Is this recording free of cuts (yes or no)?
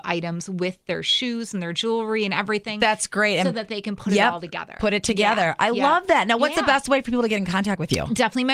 yes